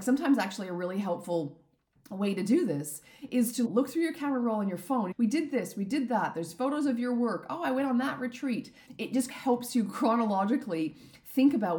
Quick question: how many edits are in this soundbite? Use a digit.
1